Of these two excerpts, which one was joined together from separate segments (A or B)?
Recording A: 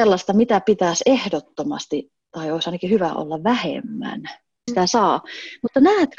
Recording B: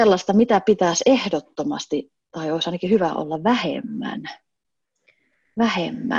A